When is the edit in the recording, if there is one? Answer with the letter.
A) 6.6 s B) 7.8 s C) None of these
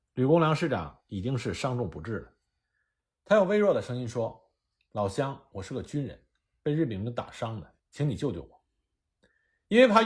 B